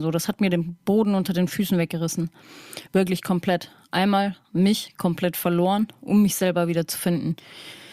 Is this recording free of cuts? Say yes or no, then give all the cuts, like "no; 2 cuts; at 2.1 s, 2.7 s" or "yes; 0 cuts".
yes; 0 cuts